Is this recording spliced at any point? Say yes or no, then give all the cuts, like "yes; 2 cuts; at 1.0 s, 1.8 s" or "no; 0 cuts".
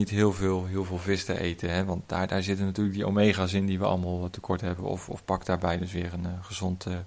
no; 0 cuts